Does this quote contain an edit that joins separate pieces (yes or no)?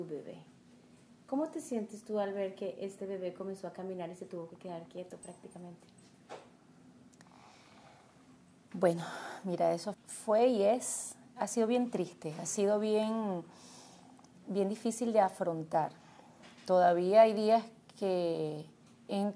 yes